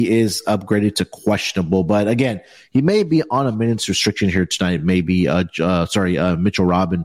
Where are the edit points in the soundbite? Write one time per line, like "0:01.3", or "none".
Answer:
none